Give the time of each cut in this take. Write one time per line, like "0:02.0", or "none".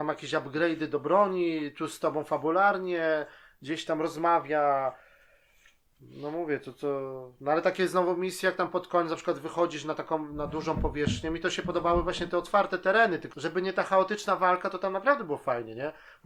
0:13.3

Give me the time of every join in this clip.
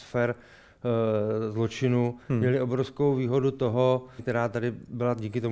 0:04.2

